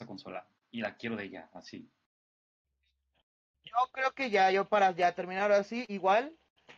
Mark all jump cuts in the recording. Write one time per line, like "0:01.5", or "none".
none

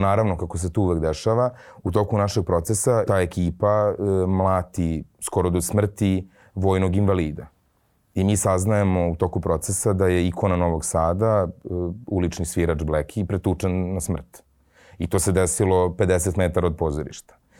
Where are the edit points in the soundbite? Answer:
0:03.1

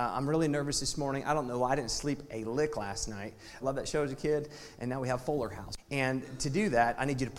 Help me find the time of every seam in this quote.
0:03.6
0:05.8

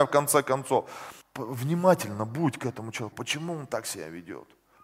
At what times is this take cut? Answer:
0:01.2
0:03.1

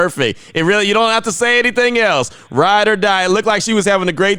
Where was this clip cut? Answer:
none

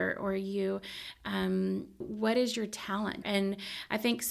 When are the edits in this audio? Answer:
0:02.0
0:03.2

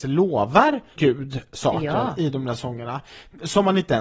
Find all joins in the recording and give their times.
0:01.0

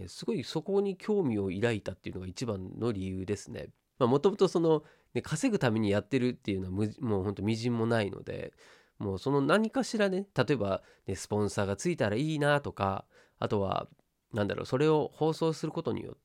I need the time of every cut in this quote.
0:03.9

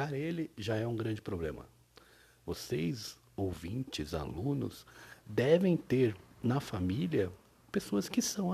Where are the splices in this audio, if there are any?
none

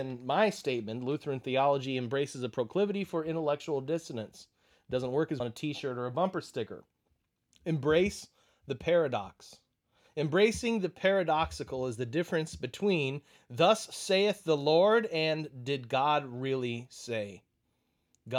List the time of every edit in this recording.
0:05.4

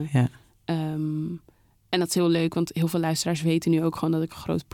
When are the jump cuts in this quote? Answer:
none

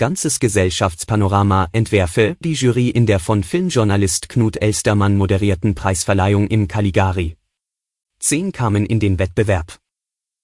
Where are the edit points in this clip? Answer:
0:02.4
0:08.0

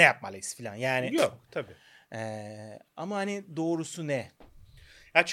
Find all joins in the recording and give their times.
none

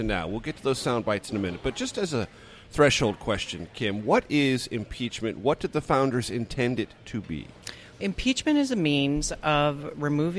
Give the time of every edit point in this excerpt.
none

